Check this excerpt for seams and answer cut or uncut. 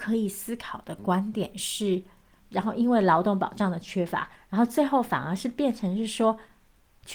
cut